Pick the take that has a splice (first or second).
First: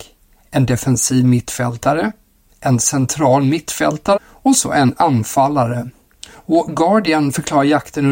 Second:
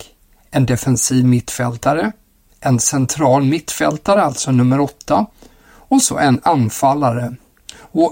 first